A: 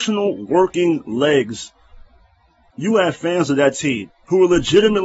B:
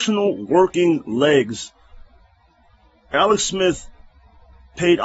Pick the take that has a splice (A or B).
A